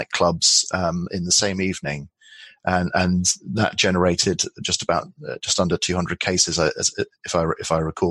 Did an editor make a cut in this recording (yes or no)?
no